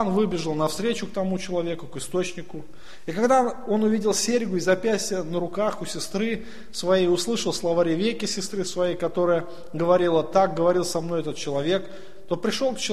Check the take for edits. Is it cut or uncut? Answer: uncut